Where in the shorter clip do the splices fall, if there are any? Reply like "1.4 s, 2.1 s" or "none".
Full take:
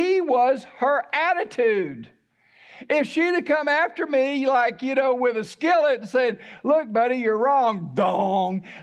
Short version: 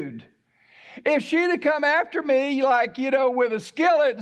none